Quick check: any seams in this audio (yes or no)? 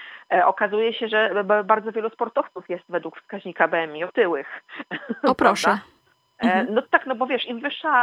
no